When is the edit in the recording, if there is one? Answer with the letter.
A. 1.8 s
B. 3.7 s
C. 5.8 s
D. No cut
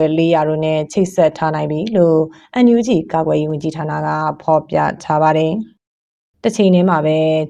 D